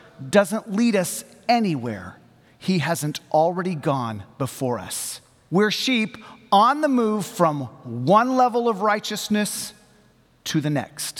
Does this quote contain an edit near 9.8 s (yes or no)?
no